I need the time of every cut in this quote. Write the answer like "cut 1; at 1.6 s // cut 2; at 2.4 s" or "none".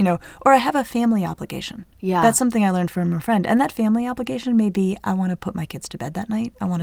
none